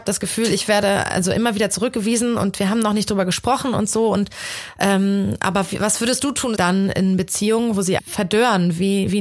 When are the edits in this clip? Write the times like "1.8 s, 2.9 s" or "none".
6.5 s, 8.0 s